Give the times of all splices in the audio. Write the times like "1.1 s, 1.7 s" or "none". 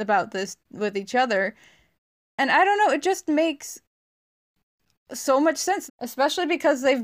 5.9 s